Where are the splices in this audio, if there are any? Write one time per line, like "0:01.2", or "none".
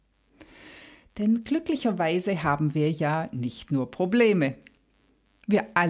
none